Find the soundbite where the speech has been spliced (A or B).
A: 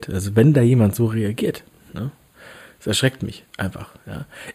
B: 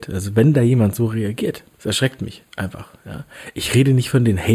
B